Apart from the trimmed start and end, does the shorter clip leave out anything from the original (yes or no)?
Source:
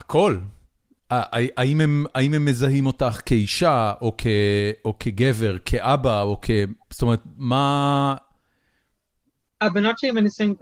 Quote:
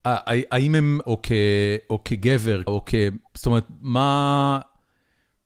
yes